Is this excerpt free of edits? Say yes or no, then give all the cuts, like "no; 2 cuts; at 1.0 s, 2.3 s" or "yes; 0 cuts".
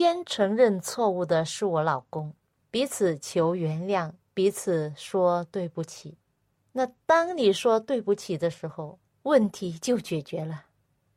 no; 2 cuts; at 2.5 s, 9.1 s